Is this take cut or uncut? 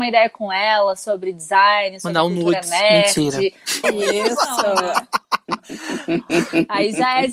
cut